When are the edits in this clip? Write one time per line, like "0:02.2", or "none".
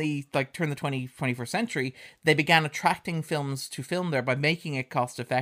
none